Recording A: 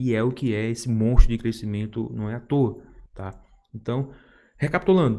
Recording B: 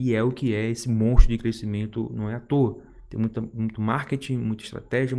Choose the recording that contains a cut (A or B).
A